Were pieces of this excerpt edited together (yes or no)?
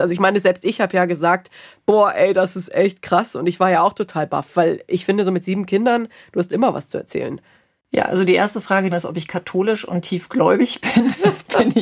yes